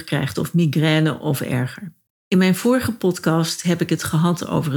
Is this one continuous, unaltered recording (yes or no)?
no